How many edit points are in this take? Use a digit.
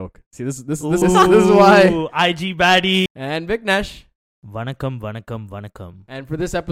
2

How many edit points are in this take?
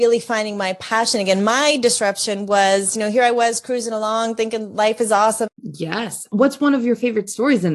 1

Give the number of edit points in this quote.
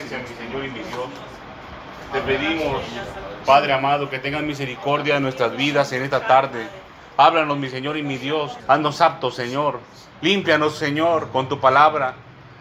2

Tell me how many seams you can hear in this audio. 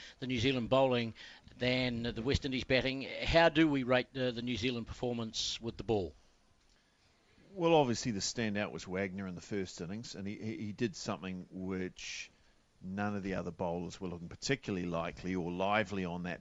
0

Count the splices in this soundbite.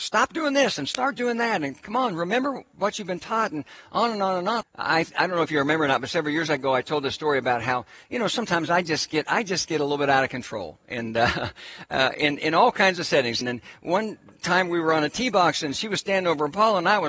2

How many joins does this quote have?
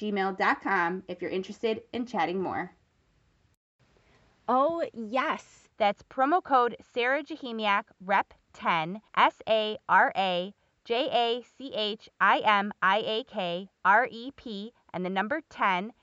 2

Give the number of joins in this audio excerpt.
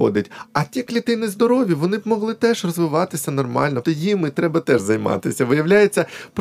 1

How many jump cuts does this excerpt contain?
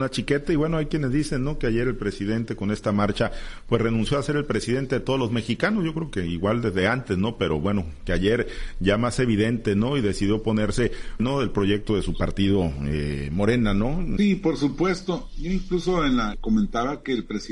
3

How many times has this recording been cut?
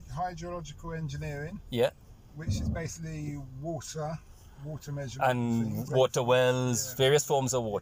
1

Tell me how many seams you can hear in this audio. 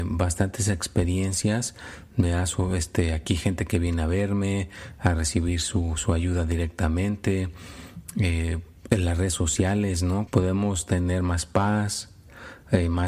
1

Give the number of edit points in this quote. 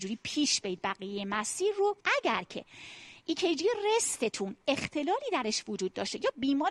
1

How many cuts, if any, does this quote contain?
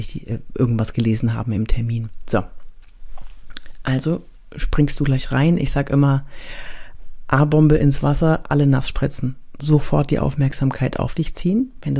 0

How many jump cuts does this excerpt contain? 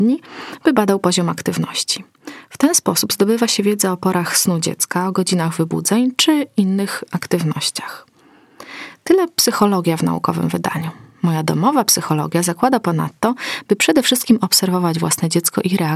0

